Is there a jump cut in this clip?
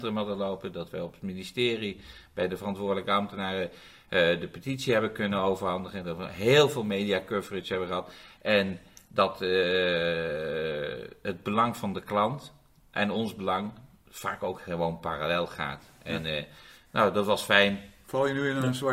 no; 0 cuts

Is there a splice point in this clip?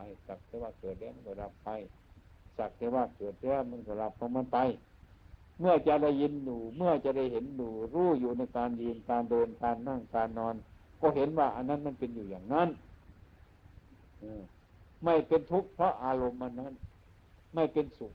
no; 0 cuts

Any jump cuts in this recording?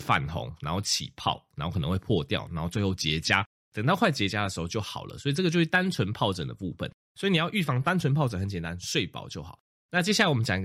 no; 0 cuts

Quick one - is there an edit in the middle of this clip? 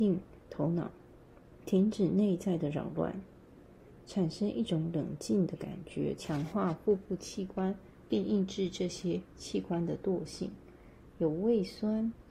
yes; 2 cuts; at 4.0 s, 6.2 s

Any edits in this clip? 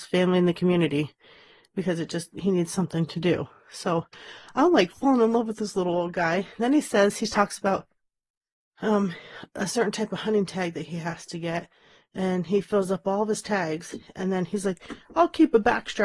no; 0 cuts

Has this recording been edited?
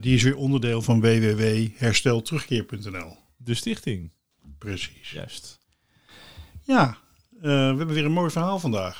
no; 0 cuts

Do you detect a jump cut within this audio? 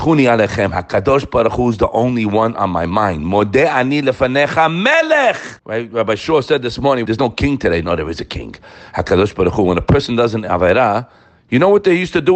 yes; 2 cuts; at 5.6 s, 7.1 s

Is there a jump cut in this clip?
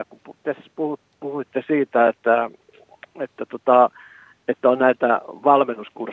no; 0 cuts

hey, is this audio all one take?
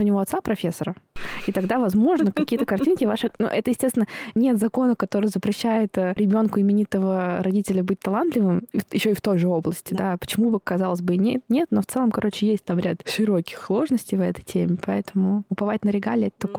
yes; 0 cuts

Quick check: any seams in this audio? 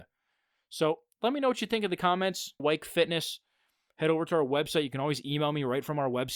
yes; 1 cut; at 2.6 s

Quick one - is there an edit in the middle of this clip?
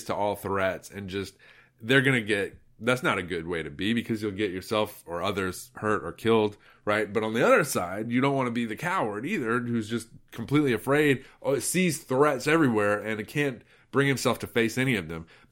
no; 0 cuts

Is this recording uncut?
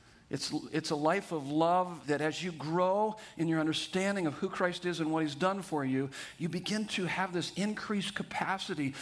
no; 1 cut; at 2.0 s

